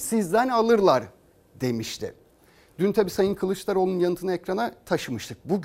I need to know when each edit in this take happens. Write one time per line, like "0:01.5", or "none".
none